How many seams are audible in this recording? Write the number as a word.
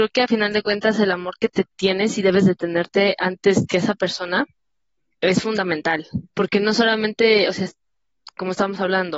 one